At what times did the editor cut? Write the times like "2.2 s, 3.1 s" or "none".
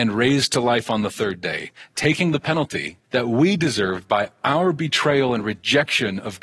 1.9 s, 3.0 s